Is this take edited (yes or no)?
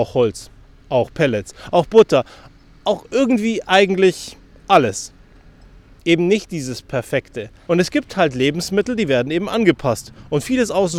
yes